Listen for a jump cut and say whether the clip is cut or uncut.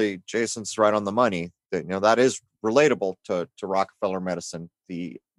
uncut